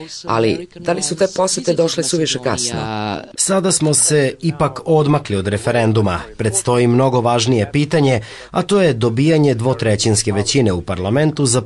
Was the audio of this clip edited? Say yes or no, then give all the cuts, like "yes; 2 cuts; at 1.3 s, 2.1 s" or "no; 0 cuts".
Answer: yes; 1 cut; at 3.4 s